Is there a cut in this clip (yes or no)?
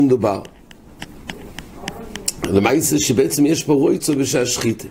no